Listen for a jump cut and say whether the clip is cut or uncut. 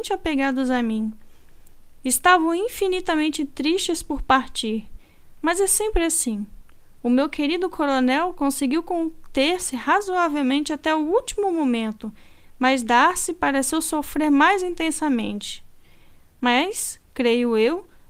uncut